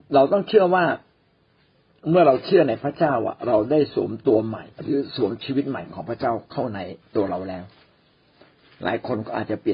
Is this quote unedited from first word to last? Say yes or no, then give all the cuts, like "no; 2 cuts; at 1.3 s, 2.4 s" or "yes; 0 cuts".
no; 1 cut; at 4.7 s